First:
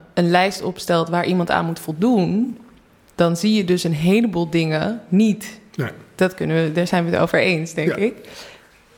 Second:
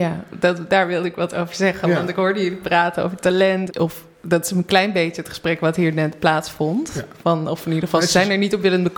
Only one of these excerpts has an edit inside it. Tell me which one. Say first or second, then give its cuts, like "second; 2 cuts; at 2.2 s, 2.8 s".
second; 1 cut; at 3.7 s